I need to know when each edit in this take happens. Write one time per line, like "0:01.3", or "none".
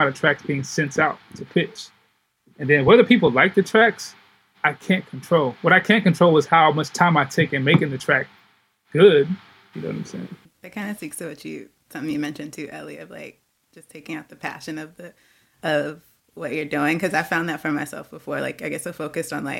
0:09.7